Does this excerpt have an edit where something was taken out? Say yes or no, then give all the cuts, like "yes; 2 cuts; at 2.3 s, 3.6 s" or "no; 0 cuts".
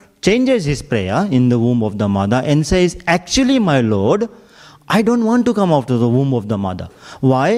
no; 0 cuts